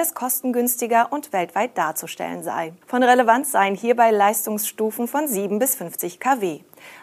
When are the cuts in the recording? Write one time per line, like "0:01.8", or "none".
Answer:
0:02.8